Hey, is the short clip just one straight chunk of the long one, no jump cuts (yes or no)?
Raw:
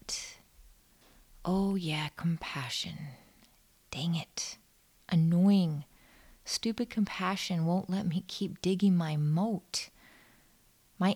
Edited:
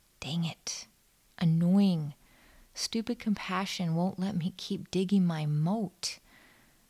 yes